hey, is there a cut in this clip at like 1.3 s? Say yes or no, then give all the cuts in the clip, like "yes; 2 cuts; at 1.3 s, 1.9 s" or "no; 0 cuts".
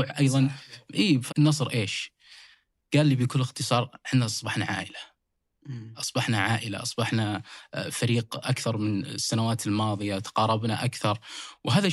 yes; 1 cut; at 1.3 s